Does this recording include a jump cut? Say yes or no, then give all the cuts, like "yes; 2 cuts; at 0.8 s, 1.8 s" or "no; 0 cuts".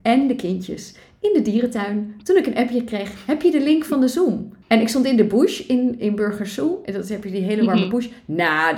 yes; 1 cut; at 4.6 s